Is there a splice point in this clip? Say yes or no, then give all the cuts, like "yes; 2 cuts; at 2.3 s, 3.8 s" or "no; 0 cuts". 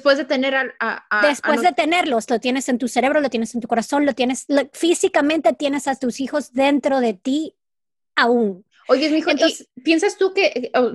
no; 0 cuts